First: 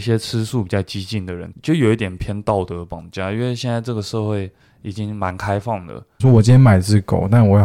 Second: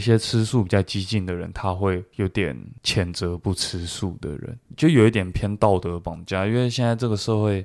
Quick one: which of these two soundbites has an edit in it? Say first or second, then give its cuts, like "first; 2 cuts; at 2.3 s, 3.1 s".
first; 2 cuts; at 1.5 s, 6.2 s